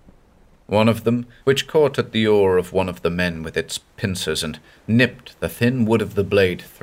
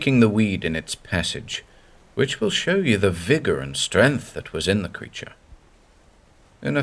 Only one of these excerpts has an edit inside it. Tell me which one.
first; 1 cut; at 1.4 s

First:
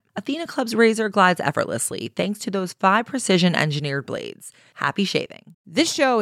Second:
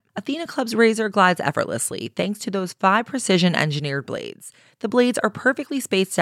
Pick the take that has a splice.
first; 1 cut; at 4.7 s

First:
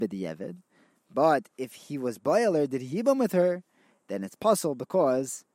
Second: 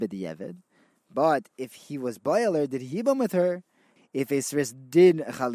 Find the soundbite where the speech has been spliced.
second; 1 cut; at 4.0 s

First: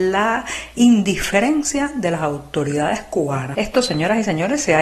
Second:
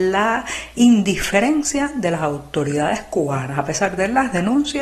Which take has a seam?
first; 1 cut; at 3.5 s

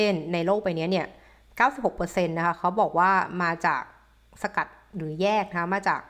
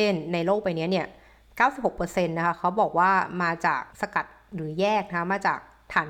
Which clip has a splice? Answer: second; 1 cut; at 3.9 s

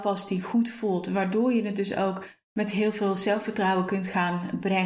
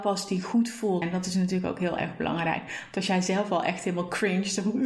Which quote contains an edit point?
second; 1 cut; at 1.0 s

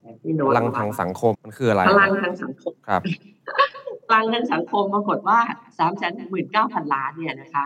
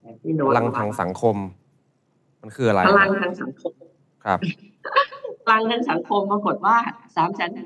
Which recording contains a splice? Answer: first; 2 cuts; at 1.3 s, 2.8 s

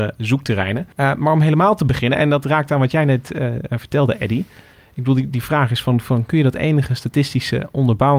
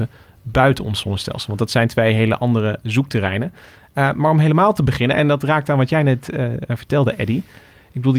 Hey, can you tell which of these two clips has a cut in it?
first; 1 cut; at 0.9 s

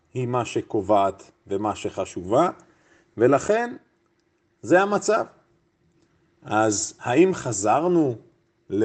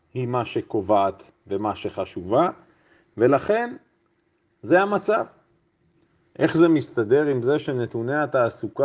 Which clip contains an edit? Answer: second; 1 cut; at 6.2 s

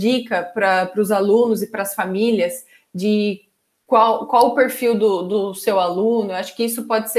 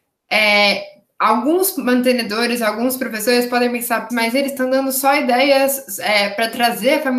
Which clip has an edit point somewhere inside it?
second; 1 cut; at 4.1 s

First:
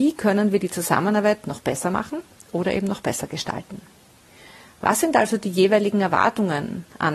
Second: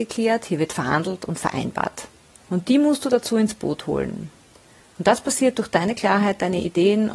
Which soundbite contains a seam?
second; 1 cut; at 2.4 s

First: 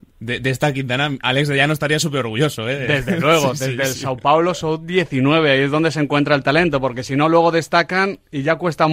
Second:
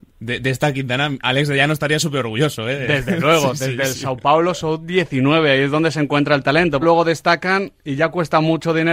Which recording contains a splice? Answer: second; 1 cut; at 6.8 s

